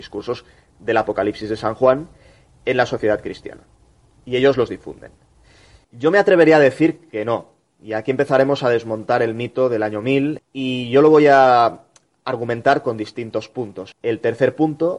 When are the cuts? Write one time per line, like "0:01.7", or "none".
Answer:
0:05.8
0:10.4
0:13.9